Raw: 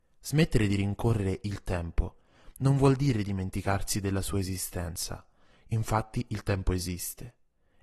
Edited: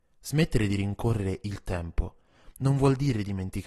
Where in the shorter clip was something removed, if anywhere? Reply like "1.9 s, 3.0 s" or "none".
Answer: none